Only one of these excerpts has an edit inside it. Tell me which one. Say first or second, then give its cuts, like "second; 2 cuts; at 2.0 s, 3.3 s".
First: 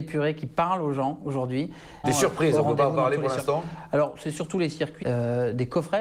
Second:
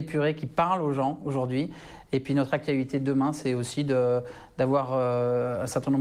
first; 2 cuts; at 2.0 s, 5.0 s